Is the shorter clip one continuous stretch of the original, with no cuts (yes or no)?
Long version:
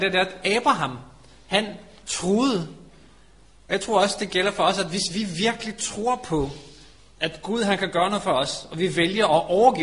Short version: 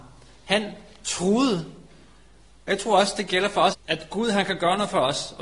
no